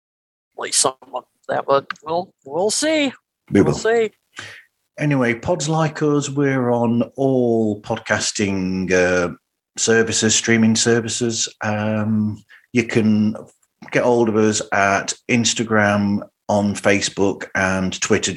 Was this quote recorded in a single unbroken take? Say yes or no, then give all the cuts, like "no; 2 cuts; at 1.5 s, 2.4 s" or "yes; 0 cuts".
yes; 0 cuts